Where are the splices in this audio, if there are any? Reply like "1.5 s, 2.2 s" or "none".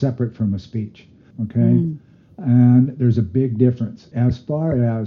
1.3 s, 4.1 s